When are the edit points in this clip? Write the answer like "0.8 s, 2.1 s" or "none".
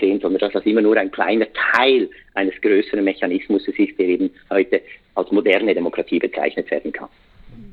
none